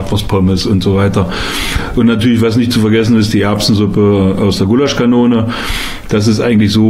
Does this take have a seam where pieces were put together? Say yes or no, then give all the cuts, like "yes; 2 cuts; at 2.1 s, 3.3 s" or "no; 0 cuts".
no; 0 cuts